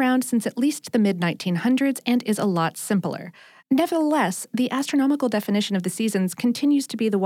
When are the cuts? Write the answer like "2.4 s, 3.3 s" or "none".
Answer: 3.6 s